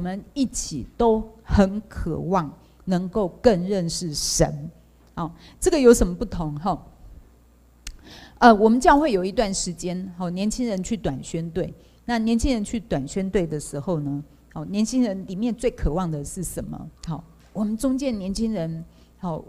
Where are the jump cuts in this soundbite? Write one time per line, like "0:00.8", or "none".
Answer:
0:17.0